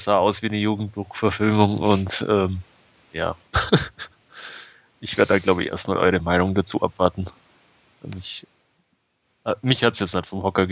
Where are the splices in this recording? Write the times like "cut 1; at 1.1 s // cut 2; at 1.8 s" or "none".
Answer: none